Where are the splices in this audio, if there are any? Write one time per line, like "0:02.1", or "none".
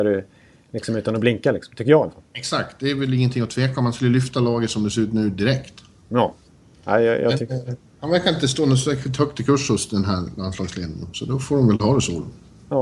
none